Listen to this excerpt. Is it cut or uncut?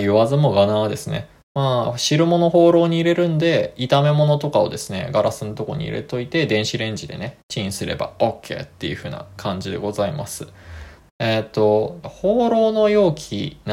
cut